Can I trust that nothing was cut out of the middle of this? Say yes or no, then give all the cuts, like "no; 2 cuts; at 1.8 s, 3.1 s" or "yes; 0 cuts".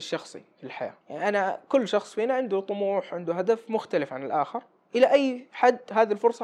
no; 1 cut; at 1.0 s